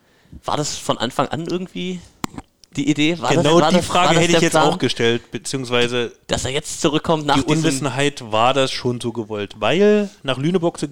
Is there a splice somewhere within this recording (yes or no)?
no